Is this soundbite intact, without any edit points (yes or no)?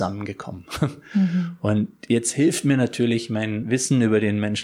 no